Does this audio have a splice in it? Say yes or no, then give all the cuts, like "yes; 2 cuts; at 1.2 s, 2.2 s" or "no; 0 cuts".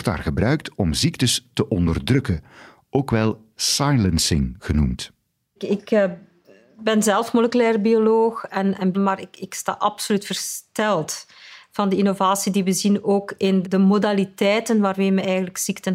yes; 2 cuts; at 8.9 s, 13.6 s